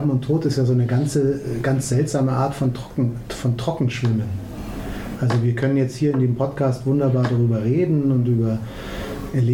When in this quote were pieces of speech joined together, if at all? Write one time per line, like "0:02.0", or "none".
none